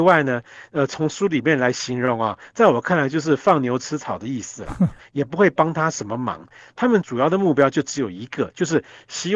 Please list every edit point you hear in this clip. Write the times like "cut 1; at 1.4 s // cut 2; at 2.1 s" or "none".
cut 1; at 5.0 s // cut 2; at 6.7 s